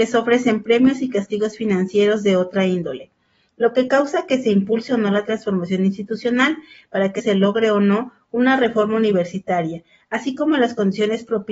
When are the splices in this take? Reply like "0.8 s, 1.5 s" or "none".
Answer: 7.2 s